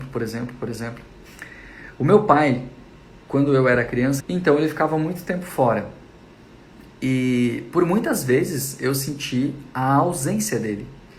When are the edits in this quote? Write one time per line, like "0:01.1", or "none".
0:04.2